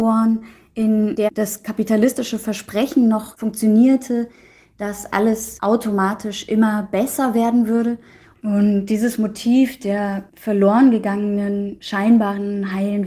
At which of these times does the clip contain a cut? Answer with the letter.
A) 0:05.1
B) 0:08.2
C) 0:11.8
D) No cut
A